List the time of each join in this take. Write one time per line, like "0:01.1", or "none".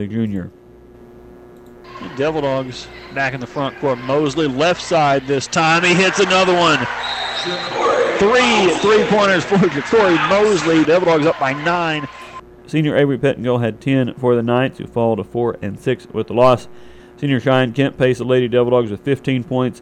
0:10.8
0:12.6
0:17.0